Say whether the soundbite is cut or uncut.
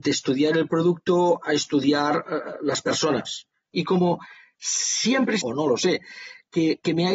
cut